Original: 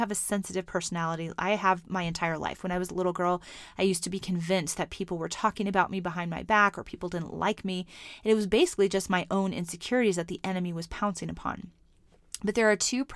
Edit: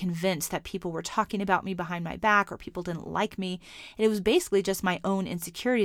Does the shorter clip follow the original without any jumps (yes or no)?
yes